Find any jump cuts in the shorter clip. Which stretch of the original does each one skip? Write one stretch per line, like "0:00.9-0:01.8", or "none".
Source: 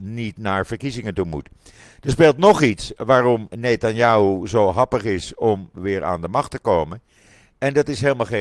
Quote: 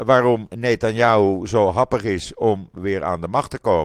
none